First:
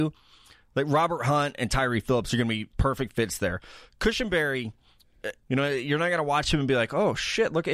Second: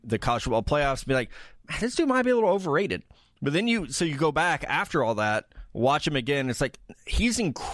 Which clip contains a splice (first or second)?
first